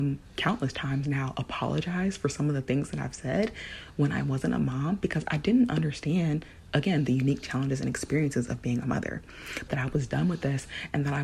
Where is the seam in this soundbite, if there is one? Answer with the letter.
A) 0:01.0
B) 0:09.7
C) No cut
B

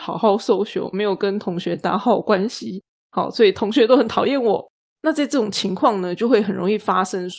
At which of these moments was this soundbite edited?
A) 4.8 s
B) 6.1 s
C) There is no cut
A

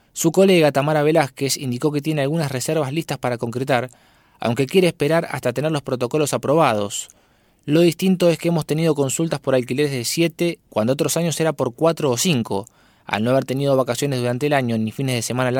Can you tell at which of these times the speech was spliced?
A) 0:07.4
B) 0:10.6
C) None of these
B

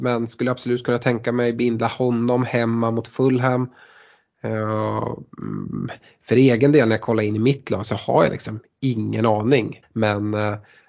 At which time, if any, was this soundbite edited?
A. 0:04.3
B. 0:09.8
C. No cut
B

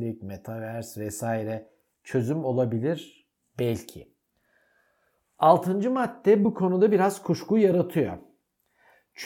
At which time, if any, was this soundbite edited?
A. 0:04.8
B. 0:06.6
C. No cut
C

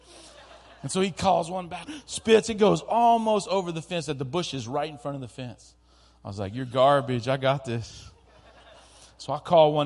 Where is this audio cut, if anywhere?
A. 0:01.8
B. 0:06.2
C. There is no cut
A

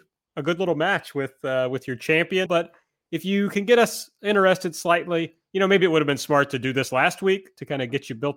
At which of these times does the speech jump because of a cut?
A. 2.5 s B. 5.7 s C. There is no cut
A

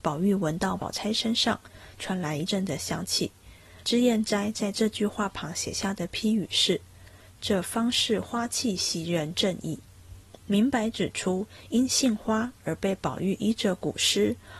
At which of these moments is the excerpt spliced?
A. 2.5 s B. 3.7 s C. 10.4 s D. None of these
A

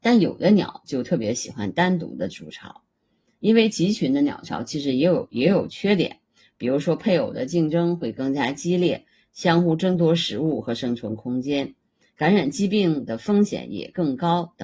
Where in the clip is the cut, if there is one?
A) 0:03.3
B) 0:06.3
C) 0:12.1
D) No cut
D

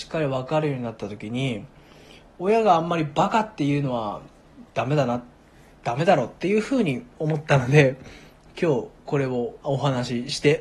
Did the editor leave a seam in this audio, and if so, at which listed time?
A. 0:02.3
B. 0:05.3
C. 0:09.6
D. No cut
C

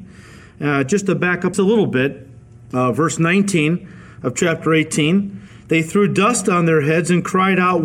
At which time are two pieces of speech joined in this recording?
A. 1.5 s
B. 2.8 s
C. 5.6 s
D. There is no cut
A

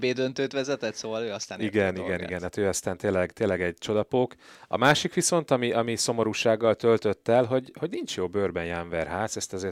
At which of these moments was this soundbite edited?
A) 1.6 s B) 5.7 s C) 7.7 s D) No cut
D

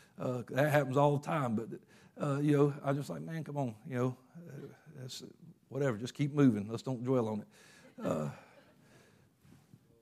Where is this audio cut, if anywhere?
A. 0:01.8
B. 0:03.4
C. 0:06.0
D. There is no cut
D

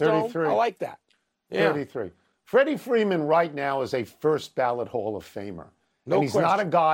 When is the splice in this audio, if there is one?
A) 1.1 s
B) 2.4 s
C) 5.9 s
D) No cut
D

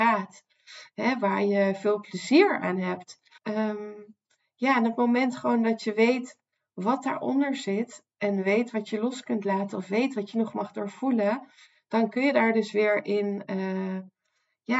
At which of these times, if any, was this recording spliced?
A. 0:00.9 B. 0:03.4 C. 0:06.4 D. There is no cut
B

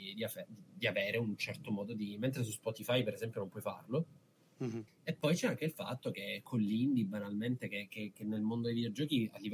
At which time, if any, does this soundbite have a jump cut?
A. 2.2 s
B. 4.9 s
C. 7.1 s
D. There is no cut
B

